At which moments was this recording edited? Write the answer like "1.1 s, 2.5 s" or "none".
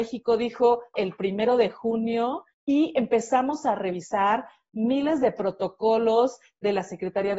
0.9 s, 2.5 s